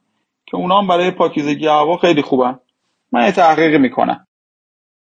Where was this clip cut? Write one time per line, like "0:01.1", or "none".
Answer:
none

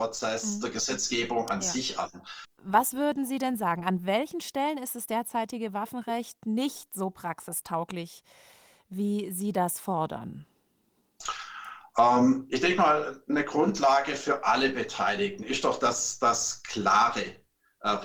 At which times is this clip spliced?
0:02.4

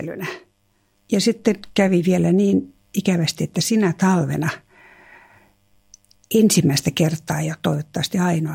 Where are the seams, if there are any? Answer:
0:00.9

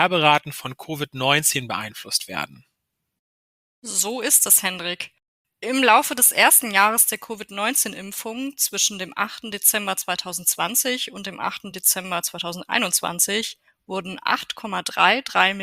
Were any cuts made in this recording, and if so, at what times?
none

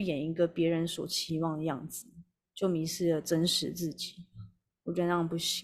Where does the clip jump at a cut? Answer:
none

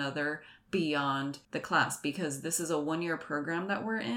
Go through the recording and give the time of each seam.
0:01.4

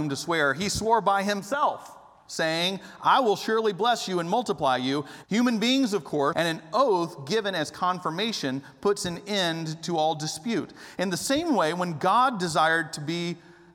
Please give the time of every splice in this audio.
0:05.2
0:06.3

